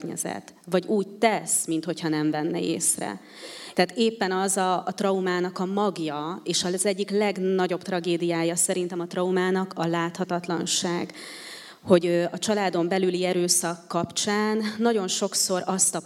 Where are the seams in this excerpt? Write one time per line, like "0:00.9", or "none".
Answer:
0:03.7